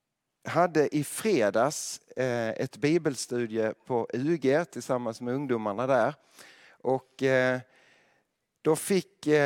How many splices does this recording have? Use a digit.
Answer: 0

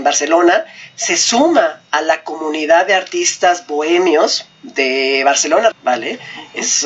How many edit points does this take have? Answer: 1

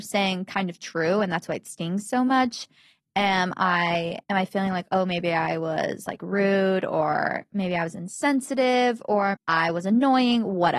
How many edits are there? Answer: 2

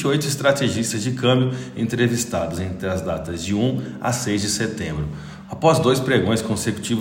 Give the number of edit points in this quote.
1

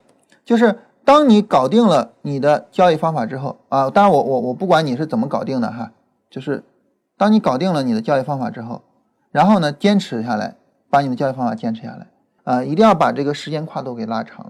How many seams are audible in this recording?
1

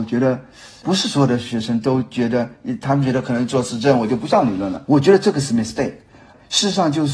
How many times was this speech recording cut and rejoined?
1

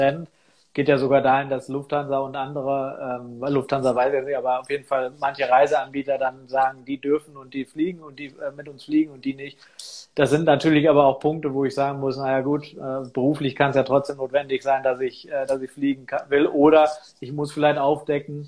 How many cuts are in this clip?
0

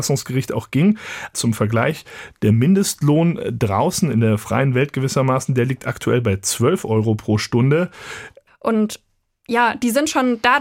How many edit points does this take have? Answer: 2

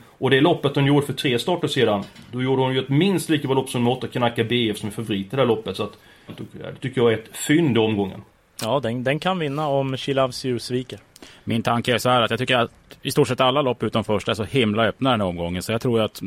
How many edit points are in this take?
1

